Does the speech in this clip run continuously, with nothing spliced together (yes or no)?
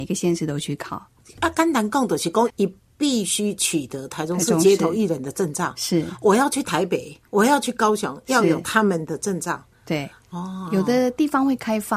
no